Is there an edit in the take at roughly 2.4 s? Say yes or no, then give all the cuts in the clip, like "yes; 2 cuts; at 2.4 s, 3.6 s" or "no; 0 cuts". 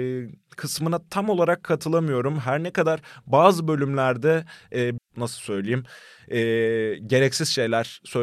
no; 1 cut; at 5.0 s